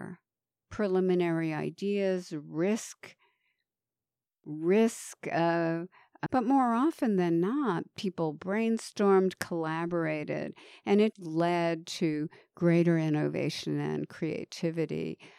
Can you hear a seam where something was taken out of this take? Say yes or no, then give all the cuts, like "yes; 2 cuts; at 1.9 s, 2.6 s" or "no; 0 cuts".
yes; 2 cuts; at 6.3 s, 11.1 s